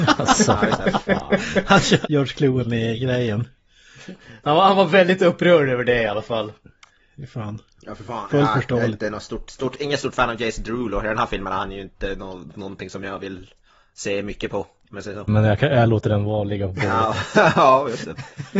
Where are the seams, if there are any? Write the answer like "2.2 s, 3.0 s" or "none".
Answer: 2.0 s, 4.4 s, 15.3 s